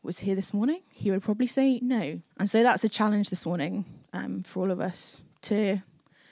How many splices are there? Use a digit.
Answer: 1